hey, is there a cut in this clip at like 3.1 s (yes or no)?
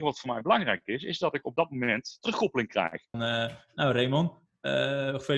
yes